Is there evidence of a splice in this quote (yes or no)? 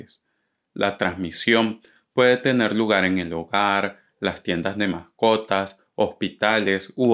no